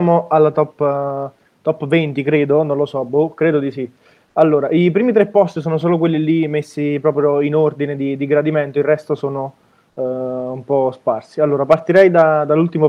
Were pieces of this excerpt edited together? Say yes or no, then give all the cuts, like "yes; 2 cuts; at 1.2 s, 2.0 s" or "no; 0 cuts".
no; 0 cuts